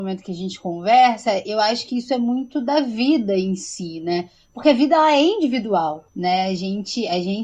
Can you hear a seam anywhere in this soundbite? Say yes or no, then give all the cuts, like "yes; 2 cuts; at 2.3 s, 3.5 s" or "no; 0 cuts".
no; 0 cuts